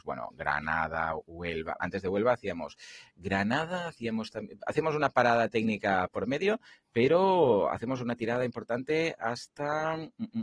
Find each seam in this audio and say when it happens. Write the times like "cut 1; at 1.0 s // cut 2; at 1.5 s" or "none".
cut 1; at 1.8 s